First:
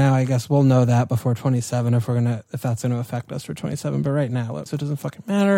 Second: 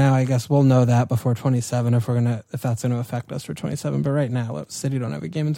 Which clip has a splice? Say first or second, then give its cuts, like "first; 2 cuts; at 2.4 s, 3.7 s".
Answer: first; 1 cut; at 4.7 s